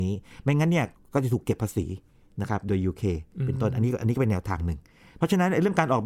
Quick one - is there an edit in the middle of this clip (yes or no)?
no